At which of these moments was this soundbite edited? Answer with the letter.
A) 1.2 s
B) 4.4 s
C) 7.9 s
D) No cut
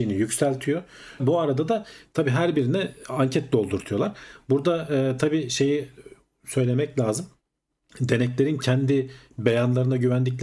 A